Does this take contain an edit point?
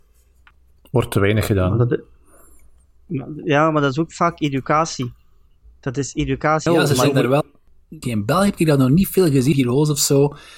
yes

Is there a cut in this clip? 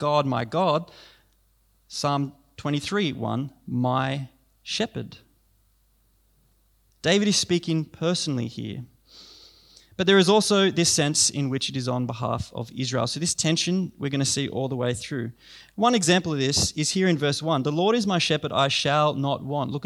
no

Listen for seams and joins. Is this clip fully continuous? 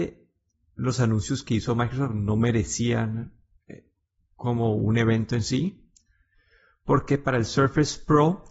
yes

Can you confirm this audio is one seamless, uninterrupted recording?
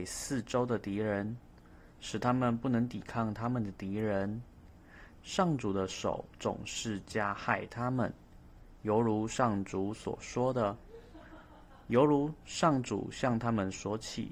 no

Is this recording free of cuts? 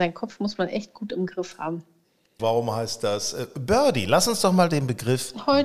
no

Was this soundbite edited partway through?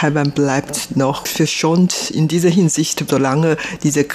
yes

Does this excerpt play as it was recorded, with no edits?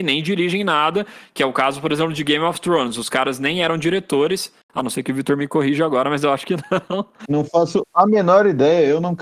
yes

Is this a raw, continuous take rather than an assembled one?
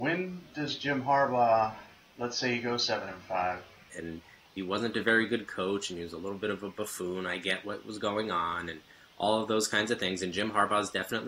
no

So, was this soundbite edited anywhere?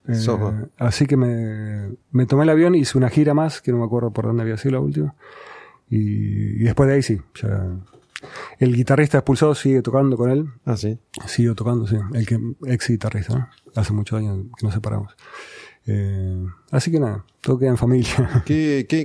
no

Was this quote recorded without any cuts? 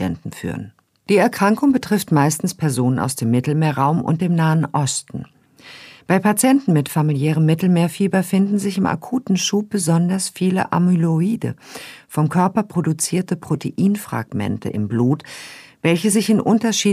no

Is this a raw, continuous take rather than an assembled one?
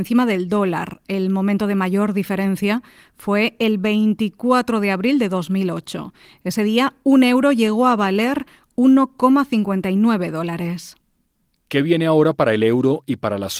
yes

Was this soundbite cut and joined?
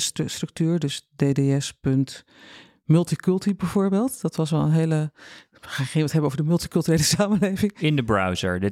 no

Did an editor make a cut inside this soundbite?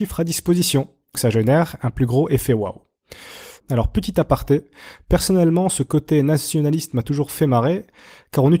yes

